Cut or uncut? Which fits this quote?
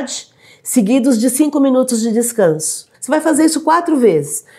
cut